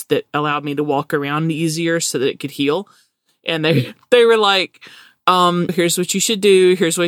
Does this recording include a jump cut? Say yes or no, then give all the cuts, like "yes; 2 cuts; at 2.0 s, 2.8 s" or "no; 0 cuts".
yes; 1 cut; at 5.7 s